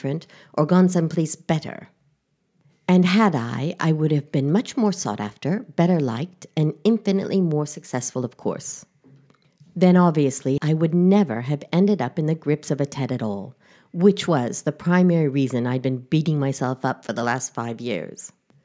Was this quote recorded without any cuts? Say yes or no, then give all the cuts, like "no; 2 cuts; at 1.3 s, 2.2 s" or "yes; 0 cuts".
no; 1 cut; at 10.6 s